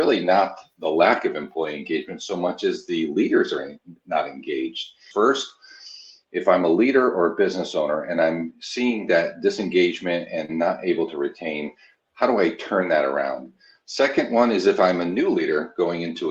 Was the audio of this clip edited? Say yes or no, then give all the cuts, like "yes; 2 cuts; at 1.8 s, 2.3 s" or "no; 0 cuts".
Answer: yes; 1 cut; at 5.1 s